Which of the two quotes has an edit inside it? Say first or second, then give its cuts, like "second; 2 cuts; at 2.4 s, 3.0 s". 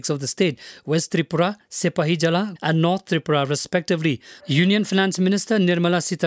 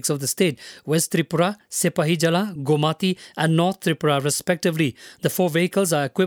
first; 2 cuts; at 2.6 s, 4.4 s